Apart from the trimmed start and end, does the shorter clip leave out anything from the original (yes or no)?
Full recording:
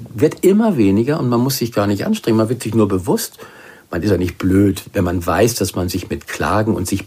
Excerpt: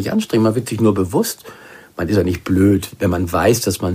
no